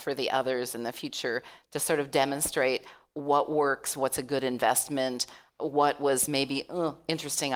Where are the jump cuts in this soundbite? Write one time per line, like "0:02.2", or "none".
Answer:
none